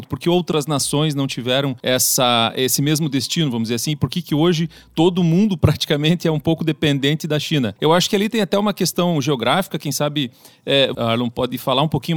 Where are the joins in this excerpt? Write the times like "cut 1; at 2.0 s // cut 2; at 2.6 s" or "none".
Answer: cut 1; at 10.9 s